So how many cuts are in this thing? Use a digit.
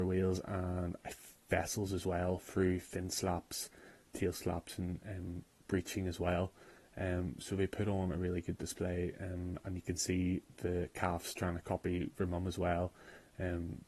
0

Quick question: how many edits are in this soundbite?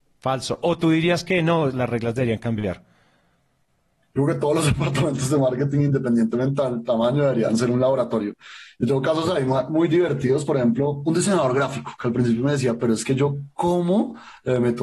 1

